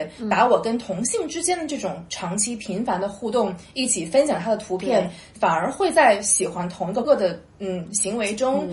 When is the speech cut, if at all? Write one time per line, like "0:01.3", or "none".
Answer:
0:07.0